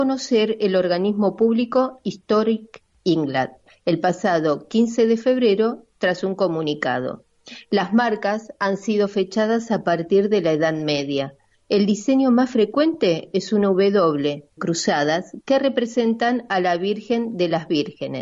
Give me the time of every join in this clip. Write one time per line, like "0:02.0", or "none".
0:14.6